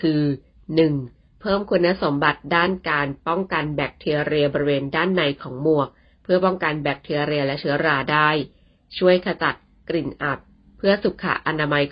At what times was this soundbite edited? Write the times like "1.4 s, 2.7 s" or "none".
1.4 s